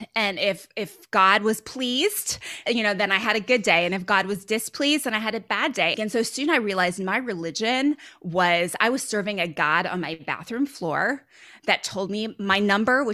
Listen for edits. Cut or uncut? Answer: cut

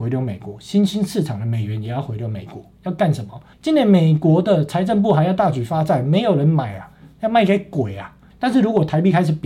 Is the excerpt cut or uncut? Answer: cut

